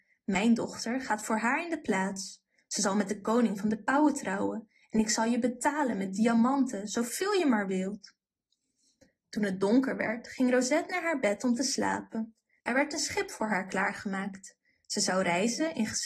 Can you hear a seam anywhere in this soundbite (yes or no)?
yes